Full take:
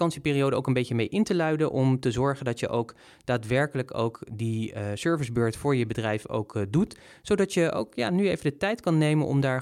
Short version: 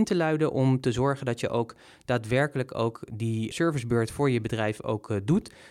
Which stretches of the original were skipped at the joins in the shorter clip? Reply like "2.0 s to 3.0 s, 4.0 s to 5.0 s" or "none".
4.7 s to 5.0 s